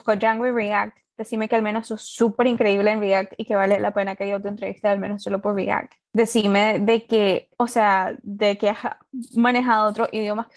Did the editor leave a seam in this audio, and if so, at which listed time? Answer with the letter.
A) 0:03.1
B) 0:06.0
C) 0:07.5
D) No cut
C